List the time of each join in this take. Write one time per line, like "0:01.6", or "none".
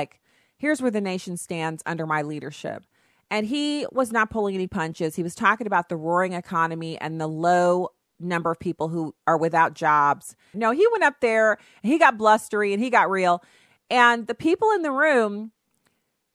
0:10.5